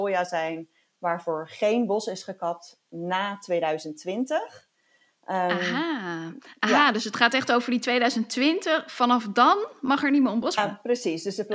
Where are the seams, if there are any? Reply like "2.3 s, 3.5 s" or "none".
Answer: 10.6 s

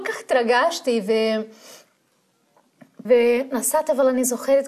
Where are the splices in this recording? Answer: 3.0 s

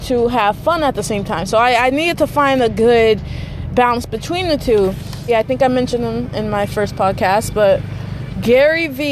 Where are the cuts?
5.3 s

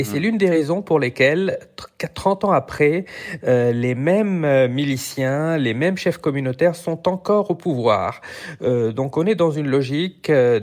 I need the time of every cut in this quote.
none

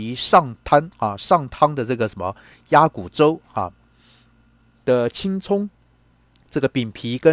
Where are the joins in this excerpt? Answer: 4.8 s

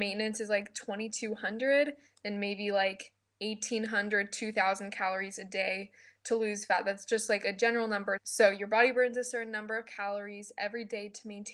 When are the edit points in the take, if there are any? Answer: 8.2 s

